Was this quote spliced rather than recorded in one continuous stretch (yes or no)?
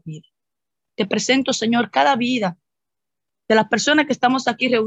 no